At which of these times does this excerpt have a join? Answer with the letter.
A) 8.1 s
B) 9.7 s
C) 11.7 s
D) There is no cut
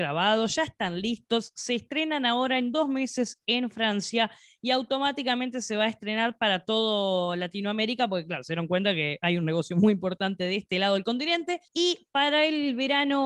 C